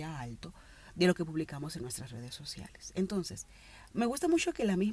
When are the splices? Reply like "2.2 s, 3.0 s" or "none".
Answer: none